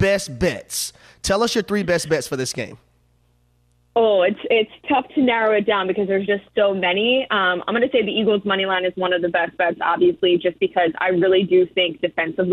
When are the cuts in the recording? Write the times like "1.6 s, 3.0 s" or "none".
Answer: none